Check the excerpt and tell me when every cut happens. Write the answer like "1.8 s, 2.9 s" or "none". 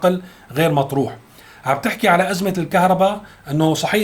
none